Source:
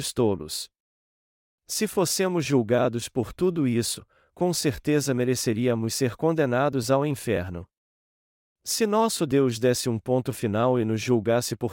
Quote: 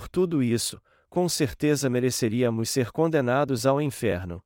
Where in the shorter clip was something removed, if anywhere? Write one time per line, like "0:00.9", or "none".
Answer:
none